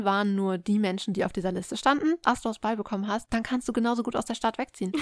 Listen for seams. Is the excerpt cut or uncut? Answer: cut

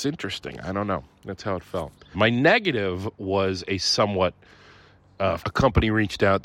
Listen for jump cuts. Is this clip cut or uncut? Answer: cut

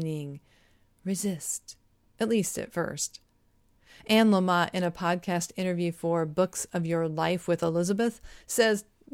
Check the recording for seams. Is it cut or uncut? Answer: uncut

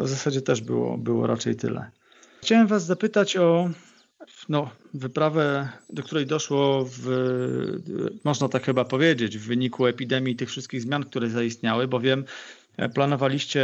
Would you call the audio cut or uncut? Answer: uncut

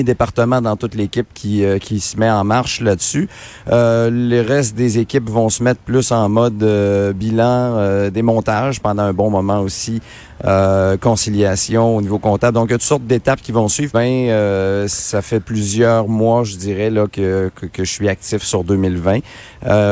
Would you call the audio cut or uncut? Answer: cut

